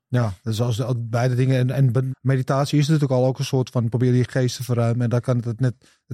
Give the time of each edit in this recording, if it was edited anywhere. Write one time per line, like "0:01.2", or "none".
0:02.1